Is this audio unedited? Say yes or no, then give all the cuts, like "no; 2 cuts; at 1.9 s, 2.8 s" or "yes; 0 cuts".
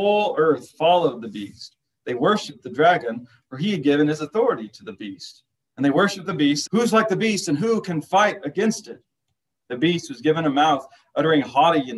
no; 1 cut; at 6.7 s